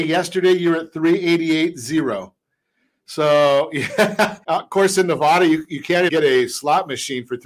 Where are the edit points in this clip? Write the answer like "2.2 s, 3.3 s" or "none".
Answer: 4.4 s, 6.1 s